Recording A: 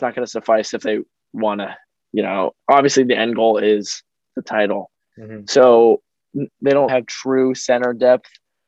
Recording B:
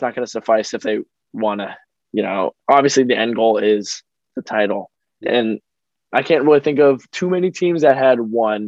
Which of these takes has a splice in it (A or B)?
A